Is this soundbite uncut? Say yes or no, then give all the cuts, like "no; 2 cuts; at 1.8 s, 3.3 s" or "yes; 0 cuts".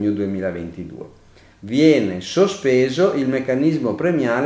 no; 1 cut; at 1.5 s